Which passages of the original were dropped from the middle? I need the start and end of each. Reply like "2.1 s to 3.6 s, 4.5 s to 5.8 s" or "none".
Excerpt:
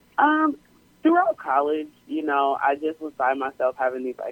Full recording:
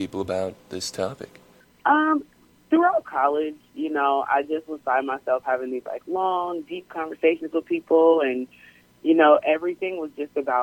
none